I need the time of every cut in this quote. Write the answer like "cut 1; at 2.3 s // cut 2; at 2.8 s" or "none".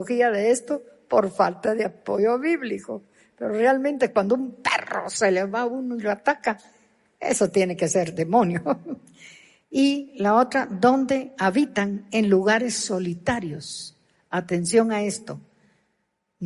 none